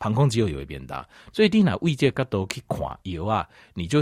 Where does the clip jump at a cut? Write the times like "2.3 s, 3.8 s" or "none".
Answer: 1.3 s, 3.0 s